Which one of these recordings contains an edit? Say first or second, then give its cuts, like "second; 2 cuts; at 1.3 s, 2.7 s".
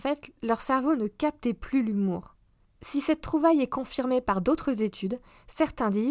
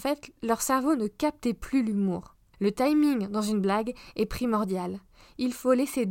second; 1 cut; at 2.5 s